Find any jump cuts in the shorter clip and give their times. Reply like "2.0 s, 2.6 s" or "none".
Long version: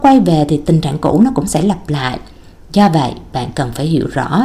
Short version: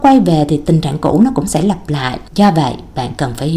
2.3 s